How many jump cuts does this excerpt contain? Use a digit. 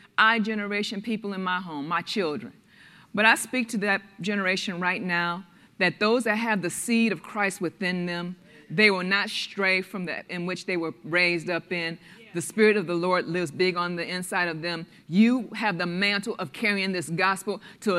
1